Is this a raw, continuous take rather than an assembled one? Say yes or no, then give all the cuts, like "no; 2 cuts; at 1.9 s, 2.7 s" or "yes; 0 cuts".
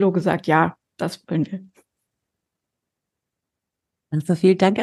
yes; 0 cuts